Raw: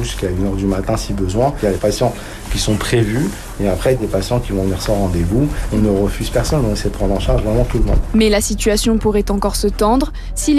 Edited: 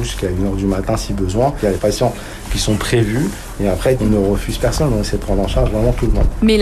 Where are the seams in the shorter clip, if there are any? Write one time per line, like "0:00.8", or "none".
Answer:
0:04.0